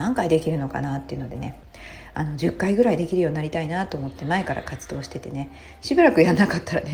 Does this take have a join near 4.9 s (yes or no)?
no